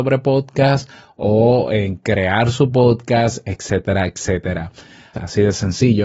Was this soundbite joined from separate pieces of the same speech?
yes; 1 cut; at 5.1 s

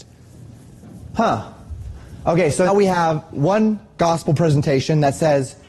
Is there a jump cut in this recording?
yes; 1 cut; at 2.7 s

